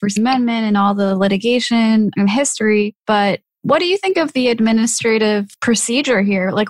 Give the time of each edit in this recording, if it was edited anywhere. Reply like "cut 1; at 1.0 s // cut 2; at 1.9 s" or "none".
none